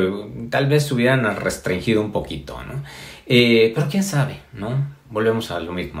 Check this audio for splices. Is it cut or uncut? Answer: uncut